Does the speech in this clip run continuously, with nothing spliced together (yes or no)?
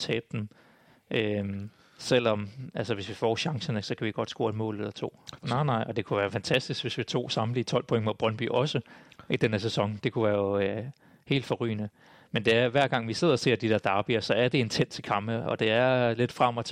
no